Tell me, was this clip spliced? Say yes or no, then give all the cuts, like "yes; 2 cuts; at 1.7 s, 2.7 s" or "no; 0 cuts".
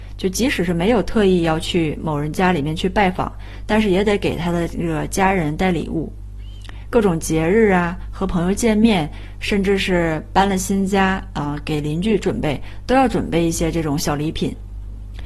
no; 0 cuts